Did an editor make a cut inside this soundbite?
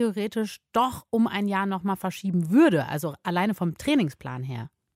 no; 0 cuts

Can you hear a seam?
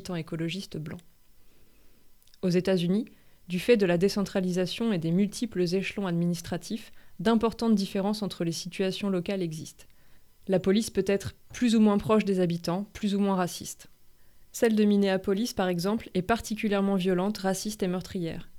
no; 0 cuts

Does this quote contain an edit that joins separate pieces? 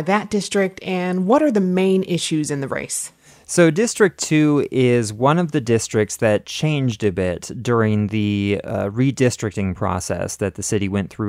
no; 0 cuts

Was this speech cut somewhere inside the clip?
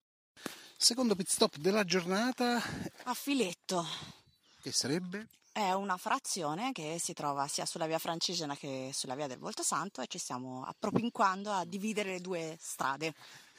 yes; 1 cut; at 2.9 s

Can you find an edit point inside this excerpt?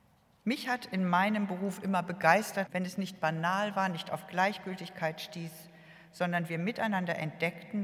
yes; 1 cut; at 2.7 s

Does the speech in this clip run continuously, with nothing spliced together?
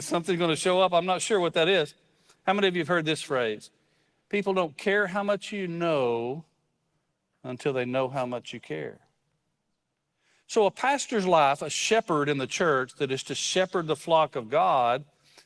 yes; 0 cuts

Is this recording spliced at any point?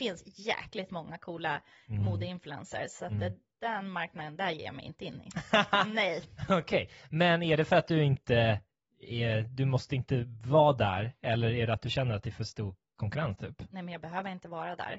no; 0 cuts

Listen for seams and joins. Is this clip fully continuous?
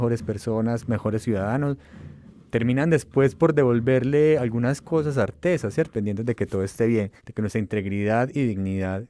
no; 2 cuts; at 5.9 s, 7.2 s

